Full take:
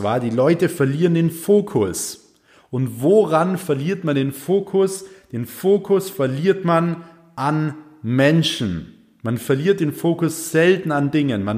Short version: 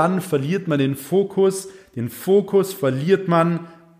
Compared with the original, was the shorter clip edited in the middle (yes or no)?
no